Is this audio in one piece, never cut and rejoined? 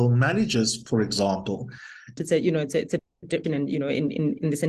no; 2 cuts; at 2.2 s, 3.4 s

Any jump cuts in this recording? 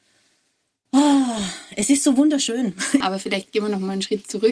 yes; 1 cut; at 3.0 s

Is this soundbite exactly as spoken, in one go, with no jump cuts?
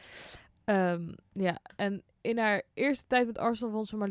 yes; 0 cuts

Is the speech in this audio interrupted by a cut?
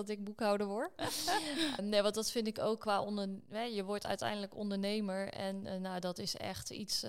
yes; 1 cut; at 1.8 s

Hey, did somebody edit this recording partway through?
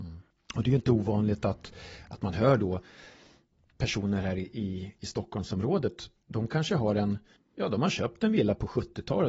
no; 0 cuts

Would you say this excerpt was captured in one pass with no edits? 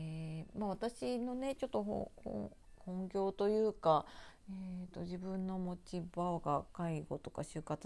yes; 0 cuts

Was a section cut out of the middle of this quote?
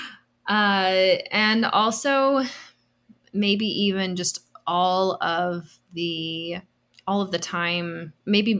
no; 0 cuts

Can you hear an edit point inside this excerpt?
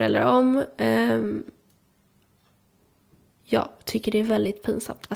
yes; 1 cut; at 3.3 s

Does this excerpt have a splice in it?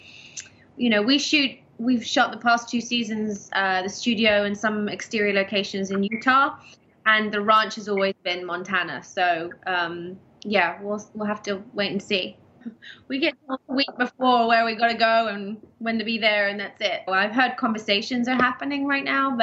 yes; 2 cuts; at 12.6 s, 17.1 s

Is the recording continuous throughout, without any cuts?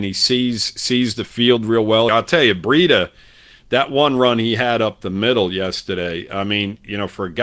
no; 1 cut; at 2.1 s

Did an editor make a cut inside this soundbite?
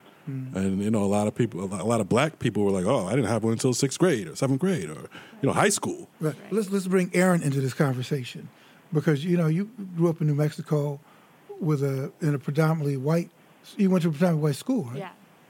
yes; 1 cut; at 3.1 s

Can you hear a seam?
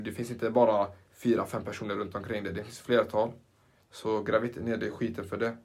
yes; 1 cut; at 3.8 s

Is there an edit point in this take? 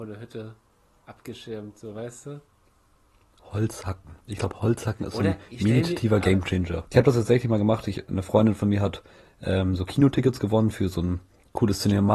yes; 1 cut; at 6.8 s

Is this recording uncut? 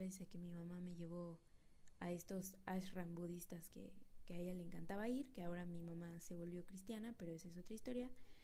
yes; 0 cuts

